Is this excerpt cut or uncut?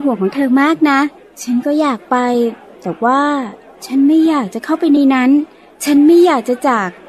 uncut